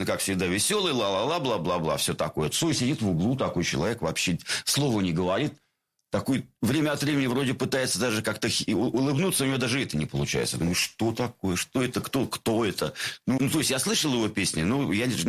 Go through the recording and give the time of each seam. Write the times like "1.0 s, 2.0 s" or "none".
13.4 s